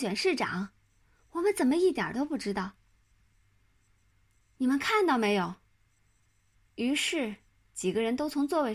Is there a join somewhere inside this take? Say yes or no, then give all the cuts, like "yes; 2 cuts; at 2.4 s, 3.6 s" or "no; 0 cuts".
yes; 2 cuts; at 3.4 s, 6.7 s